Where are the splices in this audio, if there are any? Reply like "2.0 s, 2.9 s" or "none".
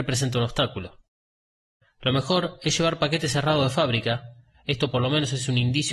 1.8 s